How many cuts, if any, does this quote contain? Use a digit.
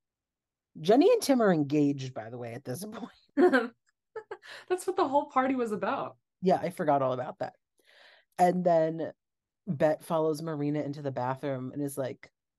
0